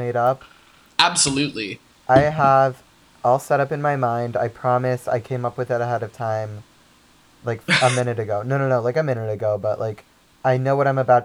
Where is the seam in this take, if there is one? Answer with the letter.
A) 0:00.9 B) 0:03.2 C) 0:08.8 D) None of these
B